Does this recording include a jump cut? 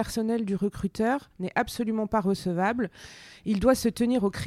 no; 0 cuts

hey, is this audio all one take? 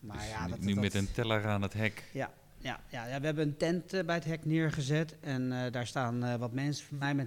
yes; 0 cuts

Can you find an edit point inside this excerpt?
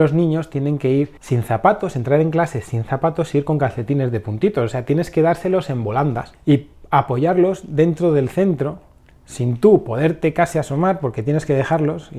no; 0 cuts

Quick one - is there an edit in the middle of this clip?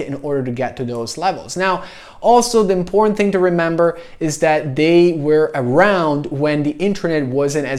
no; 0 cuts

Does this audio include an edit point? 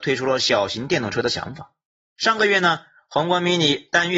yes; 1 cut; at 2.1 s

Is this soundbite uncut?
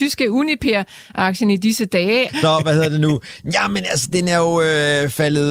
no; 1 cut; at 2.3 s

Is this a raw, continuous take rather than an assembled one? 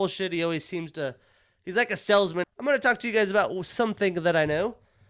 no; 1 cut; at 2.4 s

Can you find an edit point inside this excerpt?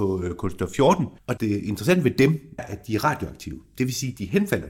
yes; 2 cuts; at 1.2 s, 2.6 s

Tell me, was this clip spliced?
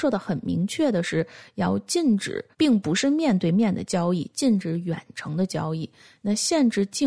yes; 1 cut; at 2.5 s

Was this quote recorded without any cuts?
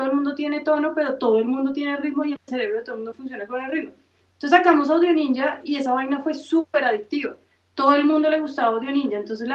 yes; 0 cuts

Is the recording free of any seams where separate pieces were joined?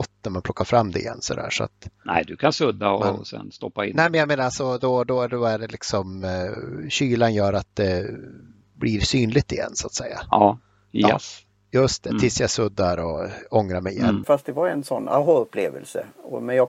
no; 1 cut; at 14.2 s

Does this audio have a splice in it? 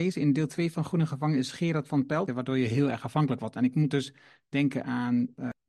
yes; 1 cut; at 2.3 s

